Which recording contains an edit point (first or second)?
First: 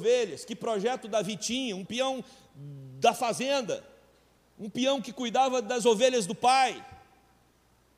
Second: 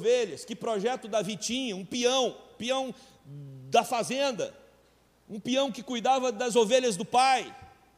first